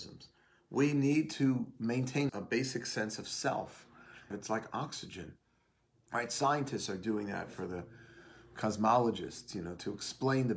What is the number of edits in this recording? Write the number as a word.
three